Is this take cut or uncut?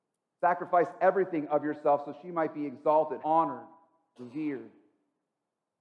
cut